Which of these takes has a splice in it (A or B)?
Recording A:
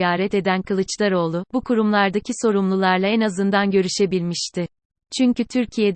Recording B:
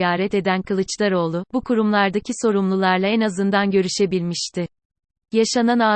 A